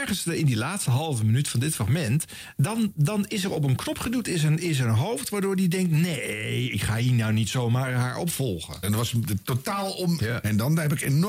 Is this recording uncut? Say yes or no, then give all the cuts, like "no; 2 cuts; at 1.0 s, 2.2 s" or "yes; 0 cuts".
no; 2 cuts; at 8.8 s, 10.2 s